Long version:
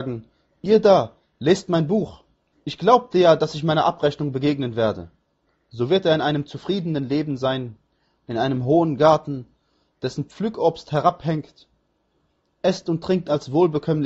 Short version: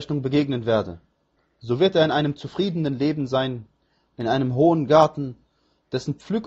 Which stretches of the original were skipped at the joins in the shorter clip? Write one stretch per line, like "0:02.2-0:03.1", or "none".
none